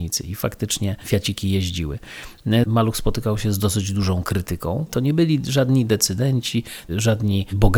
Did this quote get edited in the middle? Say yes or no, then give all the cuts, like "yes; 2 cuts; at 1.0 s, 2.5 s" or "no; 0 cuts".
yes; 2 cuts; at 2.6 s, 4.9 s